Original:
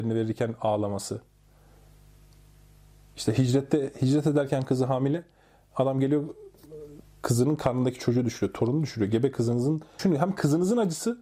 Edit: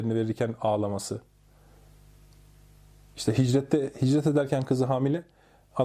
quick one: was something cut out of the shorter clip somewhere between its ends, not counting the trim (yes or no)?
no